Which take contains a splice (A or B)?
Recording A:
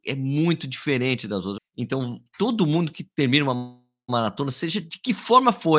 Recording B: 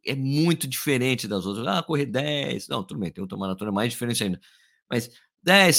A